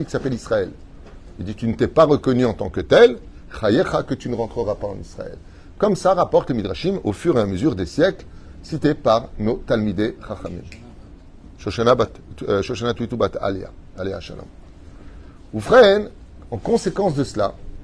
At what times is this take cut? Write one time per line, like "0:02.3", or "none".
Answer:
none